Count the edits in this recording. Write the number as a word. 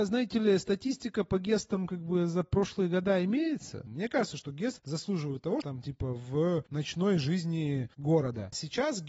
two